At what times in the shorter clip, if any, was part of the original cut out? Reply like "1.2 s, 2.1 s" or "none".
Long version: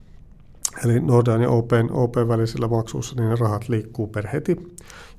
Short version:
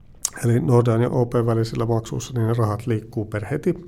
1.1 s

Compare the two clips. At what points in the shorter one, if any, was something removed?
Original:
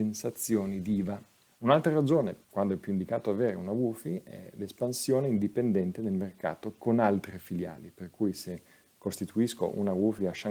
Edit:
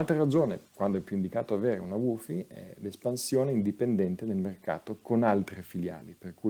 none

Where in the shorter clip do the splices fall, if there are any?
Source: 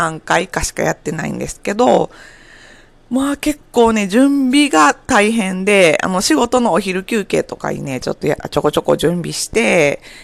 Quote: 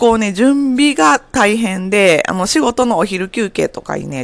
none

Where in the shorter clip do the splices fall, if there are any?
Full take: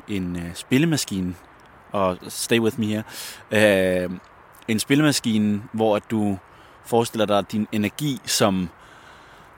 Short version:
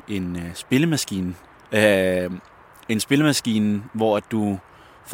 1.7 s

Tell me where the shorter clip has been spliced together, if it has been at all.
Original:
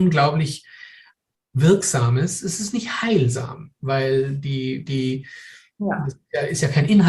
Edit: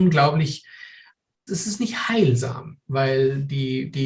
1.5 s

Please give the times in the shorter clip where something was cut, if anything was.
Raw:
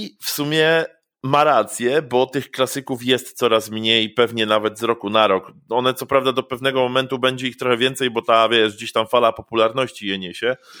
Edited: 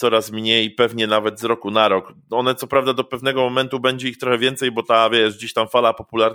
none

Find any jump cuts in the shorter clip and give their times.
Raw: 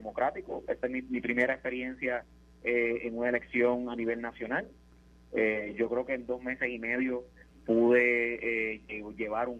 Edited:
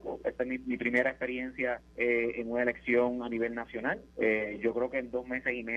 1.9 s, 4.1 s

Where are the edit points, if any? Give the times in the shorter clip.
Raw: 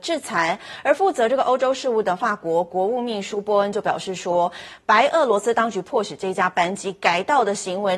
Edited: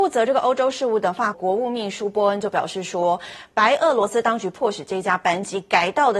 1.3 s

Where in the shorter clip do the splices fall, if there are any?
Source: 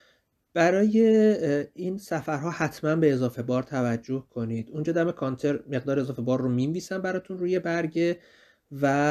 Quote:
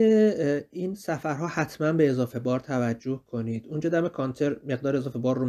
none

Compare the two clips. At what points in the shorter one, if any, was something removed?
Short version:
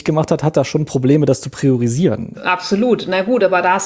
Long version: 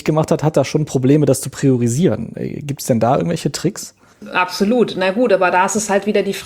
2.3 s

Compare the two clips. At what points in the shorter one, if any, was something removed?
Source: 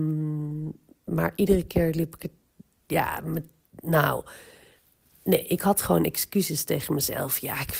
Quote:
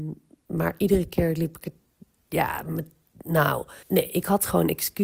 3.8 s

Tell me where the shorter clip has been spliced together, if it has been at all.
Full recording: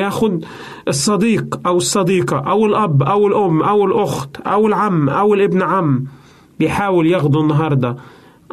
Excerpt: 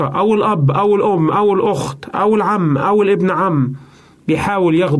none

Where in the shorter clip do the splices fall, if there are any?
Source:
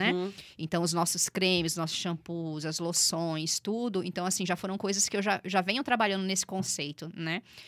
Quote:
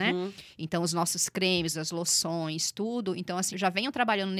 1.7 s, 3.5 s

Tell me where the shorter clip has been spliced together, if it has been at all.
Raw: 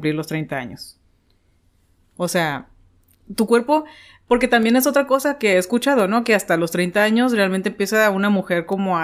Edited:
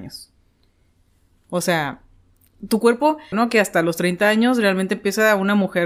3.3 s

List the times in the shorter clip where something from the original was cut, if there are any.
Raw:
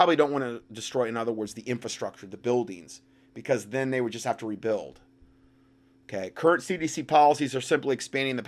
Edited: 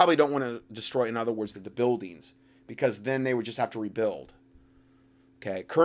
1.5 s

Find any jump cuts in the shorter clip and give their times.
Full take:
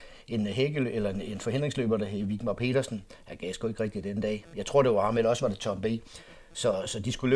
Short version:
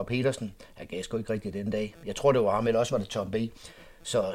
none

